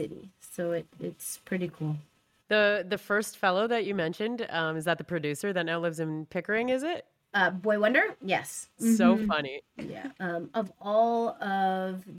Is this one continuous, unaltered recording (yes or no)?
no